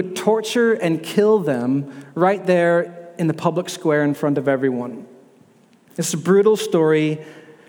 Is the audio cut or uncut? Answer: cut